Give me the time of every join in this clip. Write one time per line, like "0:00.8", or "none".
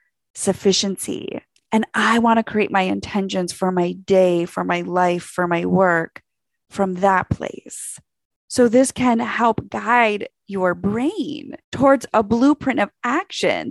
0:08.3
0:11.6